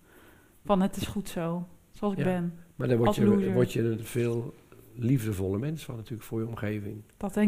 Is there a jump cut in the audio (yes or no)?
no